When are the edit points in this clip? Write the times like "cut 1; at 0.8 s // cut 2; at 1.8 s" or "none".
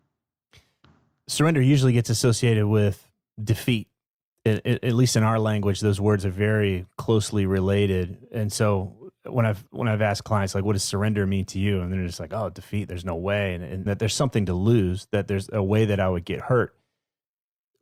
cut 1; at 13.9 s